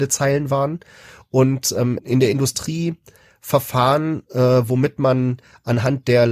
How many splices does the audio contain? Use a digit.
1